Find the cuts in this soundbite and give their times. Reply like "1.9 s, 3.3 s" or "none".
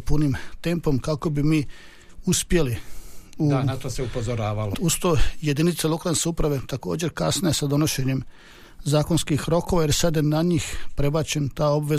4.7 s